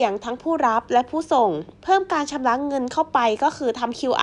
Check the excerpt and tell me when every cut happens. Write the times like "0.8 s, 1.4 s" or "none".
1.7 s